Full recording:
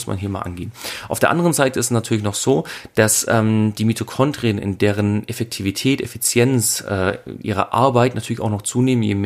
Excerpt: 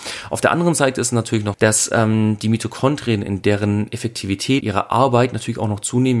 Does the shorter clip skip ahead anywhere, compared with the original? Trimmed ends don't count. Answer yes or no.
yes